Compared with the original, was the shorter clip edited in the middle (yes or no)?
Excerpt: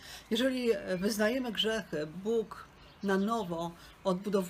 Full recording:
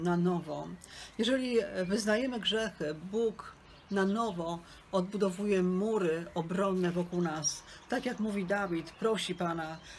no